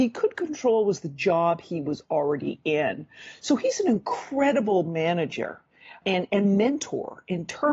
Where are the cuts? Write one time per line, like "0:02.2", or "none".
0:06.0